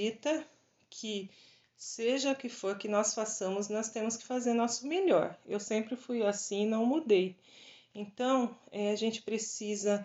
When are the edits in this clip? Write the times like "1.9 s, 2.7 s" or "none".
none